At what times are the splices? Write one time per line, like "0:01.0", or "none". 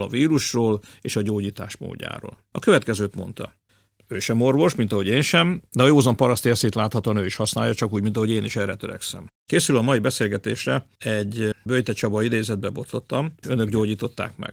0:09.3
0:13.4